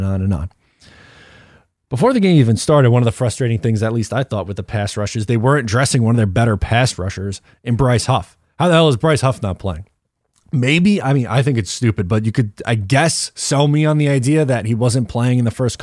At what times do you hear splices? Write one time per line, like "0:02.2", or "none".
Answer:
none